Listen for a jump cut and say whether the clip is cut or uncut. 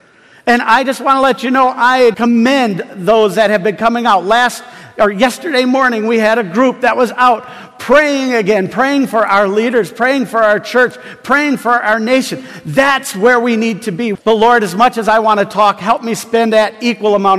cut